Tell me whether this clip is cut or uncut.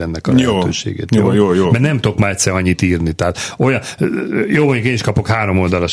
uncut